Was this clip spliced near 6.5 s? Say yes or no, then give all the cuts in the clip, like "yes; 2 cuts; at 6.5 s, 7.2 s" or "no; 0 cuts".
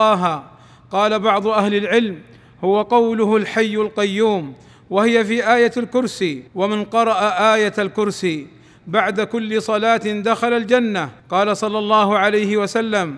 yes; 2 cuts; at 6.5 s, 11.2 s